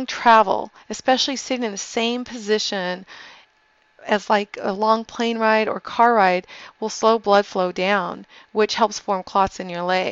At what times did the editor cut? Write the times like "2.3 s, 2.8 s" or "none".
none

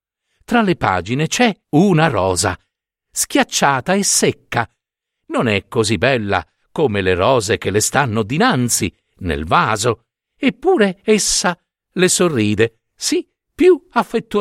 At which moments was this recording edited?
1.6 s

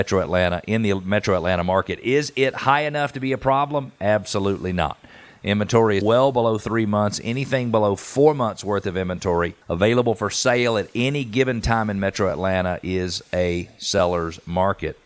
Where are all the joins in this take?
6.0 s, 9.6 s

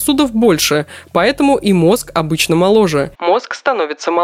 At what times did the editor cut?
3.1 s

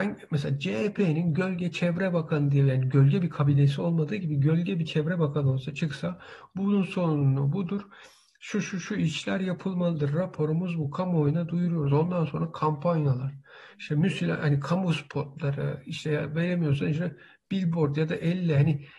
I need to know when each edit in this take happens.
none

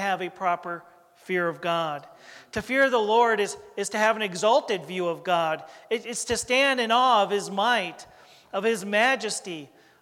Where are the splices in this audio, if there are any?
none

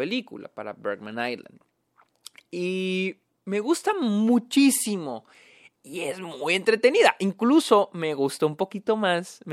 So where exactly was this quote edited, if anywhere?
5.7 s

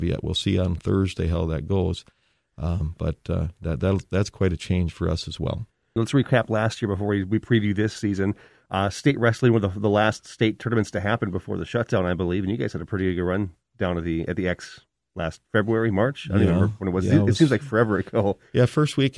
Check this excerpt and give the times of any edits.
6.0 s

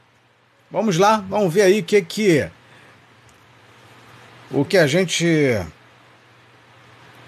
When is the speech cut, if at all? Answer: 4.7 s

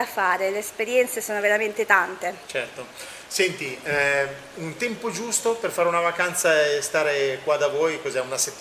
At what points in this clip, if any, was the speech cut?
none

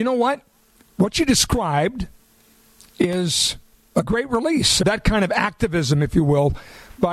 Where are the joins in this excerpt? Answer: 4.8 s

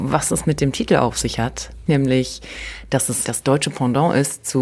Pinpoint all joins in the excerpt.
1.9 s

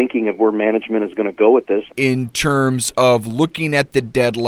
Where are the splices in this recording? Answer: 1.9 s

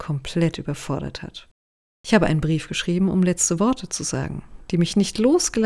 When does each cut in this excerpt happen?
none

